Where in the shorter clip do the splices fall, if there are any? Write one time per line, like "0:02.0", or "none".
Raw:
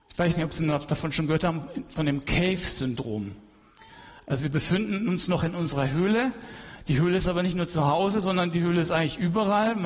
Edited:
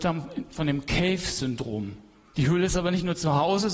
0:02.3